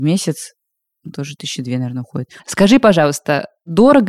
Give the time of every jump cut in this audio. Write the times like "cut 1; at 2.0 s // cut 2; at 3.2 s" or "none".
cut 1; at 2.4 s